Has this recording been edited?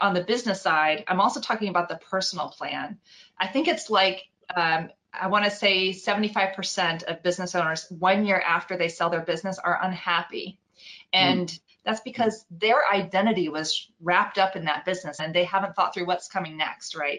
yes; 2 cuts; at 11.7 s, 15.2 s

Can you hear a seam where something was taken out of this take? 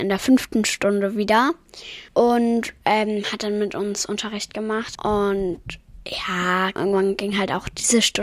yes; 3 cuts; at 2.1 s, 5.0 s, 6.8 s

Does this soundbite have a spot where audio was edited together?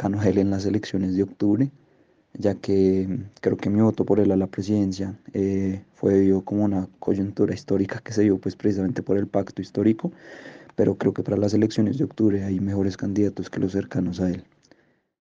no; 0 cuts

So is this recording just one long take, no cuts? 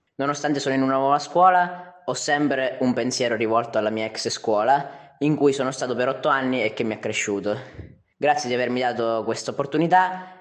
yes; 0 cuts

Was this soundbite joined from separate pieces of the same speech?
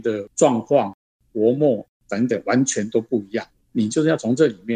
no; 0 cuts

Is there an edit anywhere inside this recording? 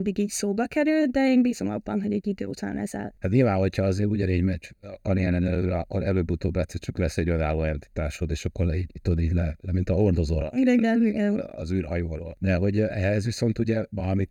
no; 0 cuts

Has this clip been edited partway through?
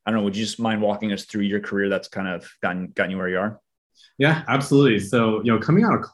no; 0 cuts

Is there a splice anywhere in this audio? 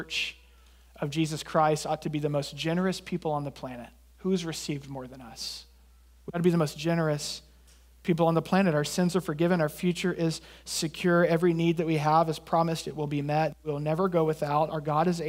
no; 0 cuts

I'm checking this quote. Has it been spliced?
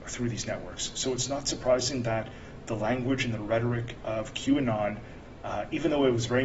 no; 0 cuts

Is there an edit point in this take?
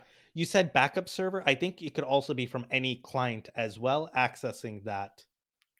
no; 0 cuts

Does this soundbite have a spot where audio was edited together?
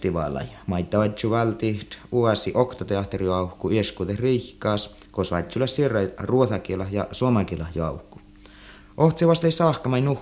yes; 2 cuts; at 5.1 s, 8.8 s

